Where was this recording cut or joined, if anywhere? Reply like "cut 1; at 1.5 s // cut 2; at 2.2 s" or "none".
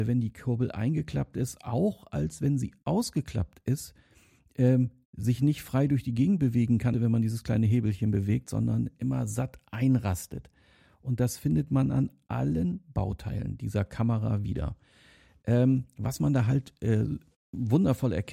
cut 1; at 6.9 s